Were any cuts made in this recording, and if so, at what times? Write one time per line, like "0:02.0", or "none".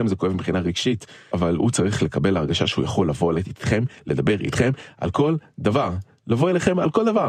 0:01.3